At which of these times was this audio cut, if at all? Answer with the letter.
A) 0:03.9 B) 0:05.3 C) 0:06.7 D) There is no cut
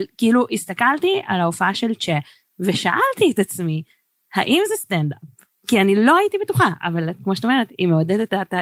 D